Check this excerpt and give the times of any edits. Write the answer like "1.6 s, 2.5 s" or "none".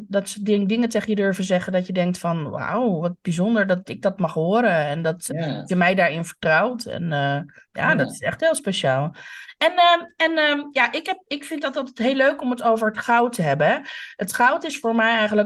5.3 s